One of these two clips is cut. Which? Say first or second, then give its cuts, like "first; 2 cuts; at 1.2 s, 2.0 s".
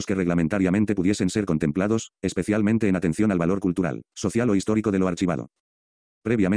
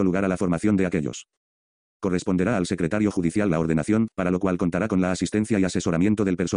second; 2 cuts; at 1.9 s, 4.1 s